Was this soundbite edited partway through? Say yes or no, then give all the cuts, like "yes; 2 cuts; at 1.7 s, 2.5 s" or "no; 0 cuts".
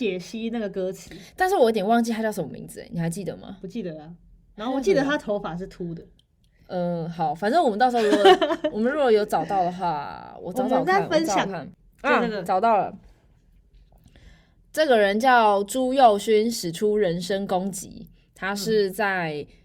no; 0 cuts